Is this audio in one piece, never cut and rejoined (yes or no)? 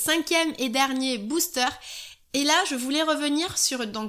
yes